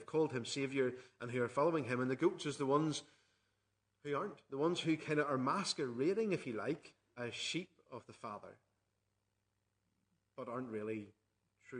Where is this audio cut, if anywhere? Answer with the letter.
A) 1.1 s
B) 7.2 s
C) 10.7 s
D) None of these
B